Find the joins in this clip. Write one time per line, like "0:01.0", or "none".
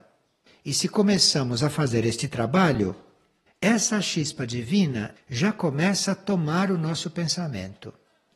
0:05.2